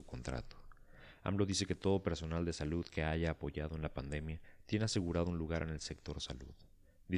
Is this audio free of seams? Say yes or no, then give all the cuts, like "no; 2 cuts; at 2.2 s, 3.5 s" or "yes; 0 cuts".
yes; 0 cuts